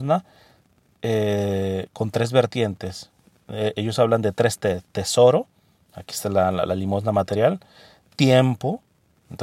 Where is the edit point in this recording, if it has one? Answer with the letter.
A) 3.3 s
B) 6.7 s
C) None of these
C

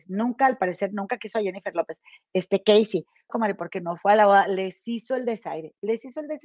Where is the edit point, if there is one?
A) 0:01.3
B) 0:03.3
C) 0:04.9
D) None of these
B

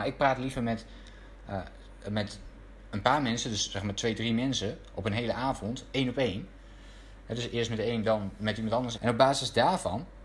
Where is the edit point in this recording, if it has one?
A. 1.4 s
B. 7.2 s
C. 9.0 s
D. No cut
C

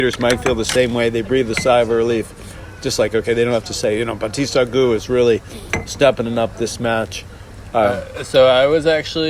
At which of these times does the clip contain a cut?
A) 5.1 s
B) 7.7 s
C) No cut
C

